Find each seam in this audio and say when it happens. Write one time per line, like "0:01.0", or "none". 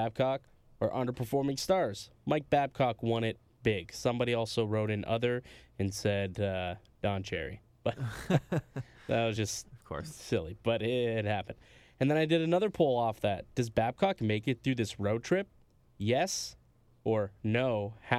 none